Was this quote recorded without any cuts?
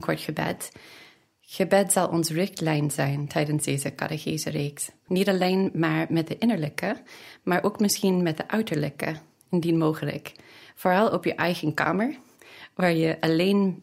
no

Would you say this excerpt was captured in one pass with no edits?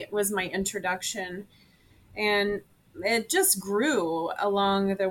yes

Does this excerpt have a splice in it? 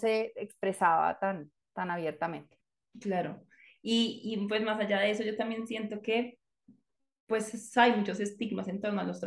no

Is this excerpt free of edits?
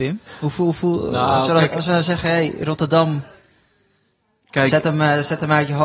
yes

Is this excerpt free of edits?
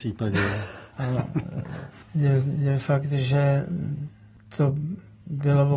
no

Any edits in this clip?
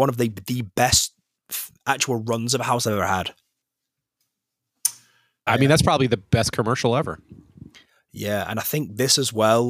yes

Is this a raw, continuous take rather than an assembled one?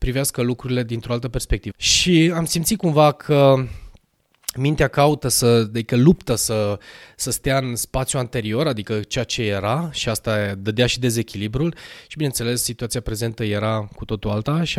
no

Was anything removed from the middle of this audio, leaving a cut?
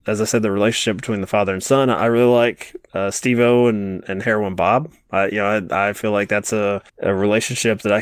yes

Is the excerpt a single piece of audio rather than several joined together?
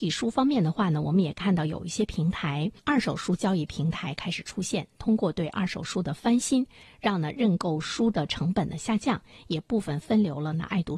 no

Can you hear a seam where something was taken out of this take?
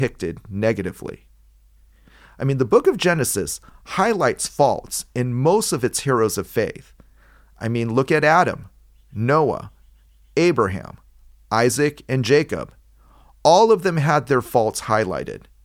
no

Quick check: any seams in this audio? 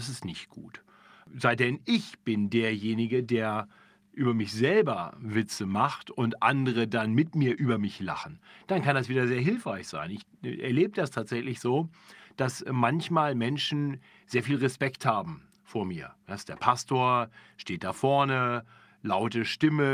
no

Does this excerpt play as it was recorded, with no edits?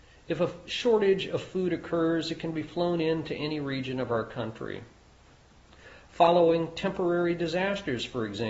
yes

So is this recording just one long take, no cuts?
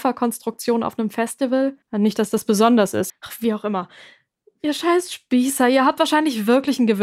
no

